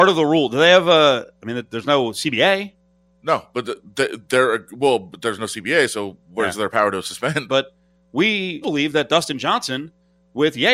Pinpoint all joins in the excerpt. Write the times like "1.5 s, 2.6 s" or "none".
7.5 s, 8.6 s